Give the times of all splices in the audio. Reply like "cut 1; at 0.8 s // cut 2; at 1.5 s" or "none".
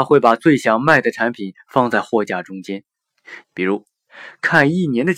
cut 1; at 3.4 s